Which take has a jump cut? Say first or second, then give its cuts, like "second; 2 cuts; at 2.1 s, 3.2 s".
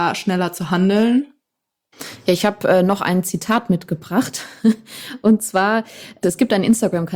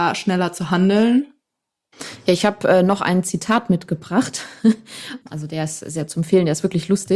second; 1 cut; at 5.2 s